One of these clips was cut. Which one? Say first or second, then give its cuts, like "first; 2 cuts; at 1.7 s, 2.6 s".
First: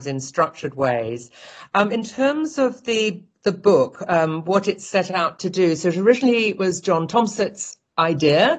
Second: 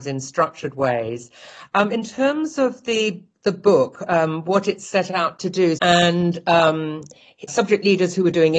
second; 2 cuts; at 5.8 s, 7.5 s